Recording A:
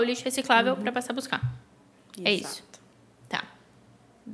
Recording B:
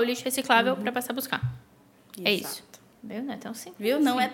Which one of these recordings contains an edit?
B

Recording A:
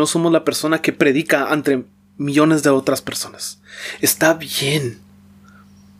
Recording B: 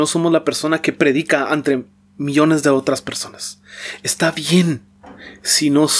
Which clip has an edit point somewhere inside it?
A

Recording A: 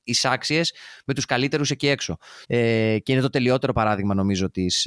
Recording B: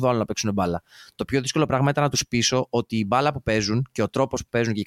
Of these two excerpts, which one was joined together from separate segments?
A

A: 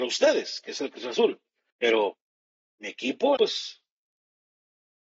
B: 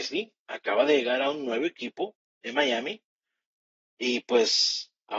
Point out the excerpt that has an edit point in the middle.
A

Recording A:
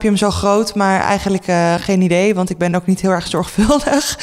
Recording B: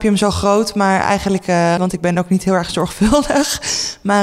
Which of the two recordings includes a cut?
B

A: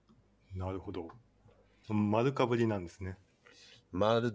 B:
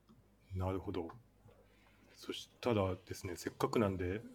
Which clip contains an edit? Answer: A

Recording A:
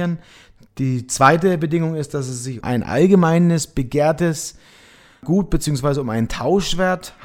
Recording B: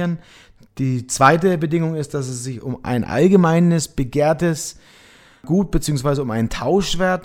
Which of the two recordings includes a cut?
A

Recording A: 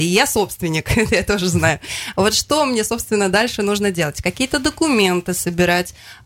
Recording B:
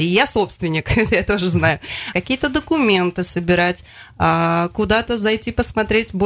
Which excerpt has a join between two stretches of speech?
B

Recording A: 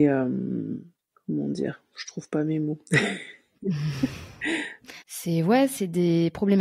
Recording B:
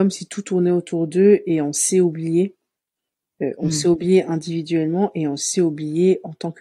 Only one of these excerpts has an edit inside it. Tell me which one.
A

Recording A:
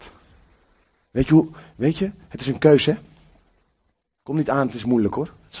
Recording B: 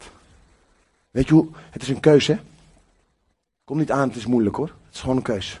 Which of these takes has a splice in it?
B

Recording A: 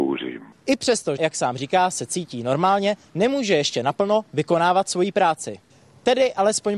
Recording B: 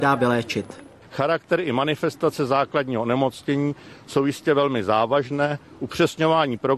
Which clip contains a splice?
A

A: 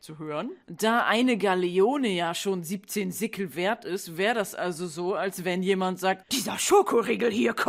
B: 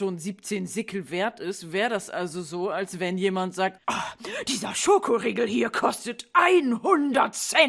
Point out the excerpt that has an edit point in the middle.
A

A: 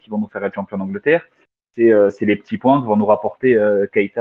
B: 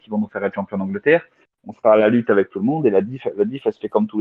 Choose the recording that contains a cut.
B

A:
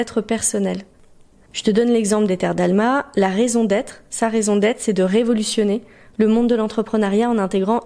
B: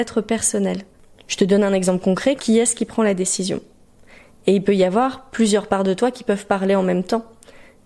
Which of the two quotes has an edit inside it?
B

